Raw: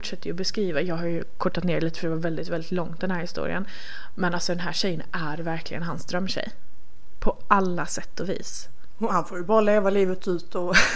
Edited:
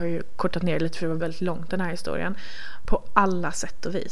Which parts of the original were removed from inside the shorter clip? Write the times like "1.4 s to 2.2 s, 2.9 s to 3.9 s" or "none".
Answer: 2.2 s to 2.5 s, 4.2 s to 7.2 s